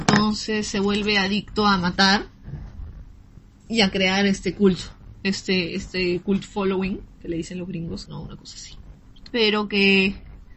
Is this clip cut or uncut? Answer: cut